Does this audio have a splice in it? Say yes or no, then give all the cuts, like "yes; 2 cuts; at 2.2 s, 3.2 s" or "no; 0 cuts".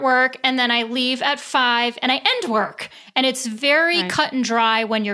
no; 0 cuts